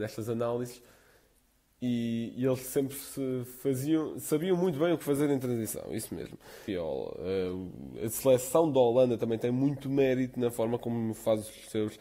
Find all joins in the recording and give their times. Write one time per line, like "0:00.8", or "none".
0:06.7